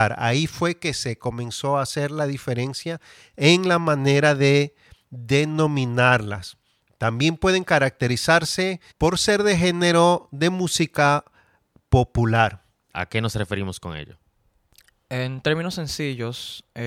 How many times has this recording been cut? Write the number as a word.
two